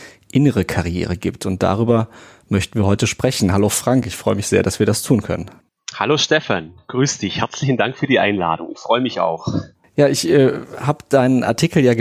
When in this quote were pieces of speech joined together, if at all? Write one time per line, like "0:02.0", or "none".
none